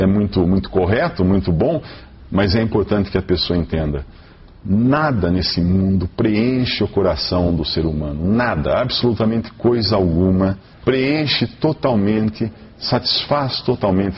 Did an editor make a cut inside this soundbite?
no; 0 cuts

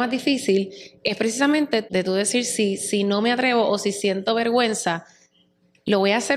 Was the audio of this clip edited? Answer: no; 0 cuts

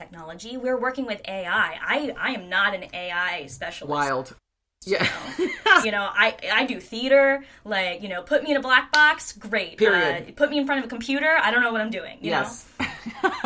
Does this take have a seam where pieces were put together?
yes; 1 cut; at 5.8 s

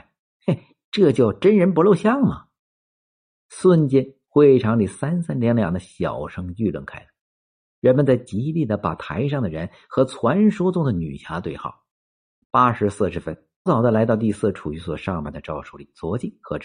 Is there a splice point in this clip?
yes; 2 cuts; at 12.4 s, 13.7 s

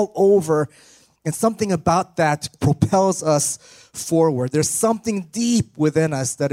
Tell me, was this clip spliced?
yes; 1 cut; at 2.6 s

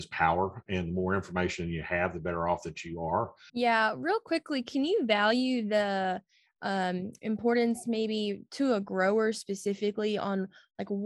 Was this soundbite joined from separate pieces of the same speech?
yes; 1 cut; at 3.5 s

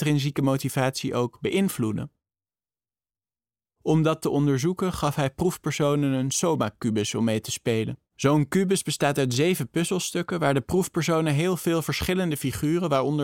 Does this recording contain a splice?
yes; 1 cut; at 8.1 s

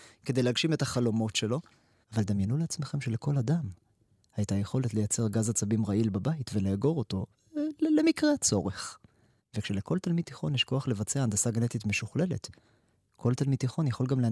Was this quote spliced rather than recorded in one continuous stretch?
yes; 2 cuts; at 2.0 s, 9.4 s

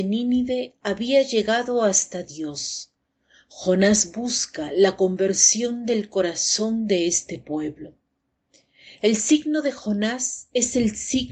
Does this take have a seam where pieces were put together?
no; 0 cuts

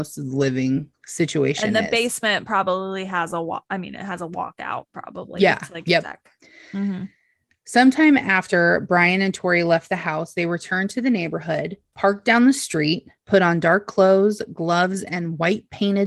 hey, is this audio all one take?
yes; 0 cuts

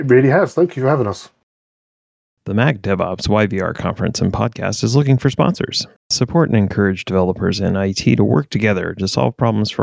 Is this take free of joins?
yes; 0 cuts

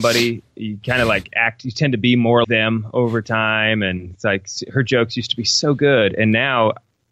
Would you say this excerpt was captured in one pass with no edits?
no; 1 cut; at 2.4 s

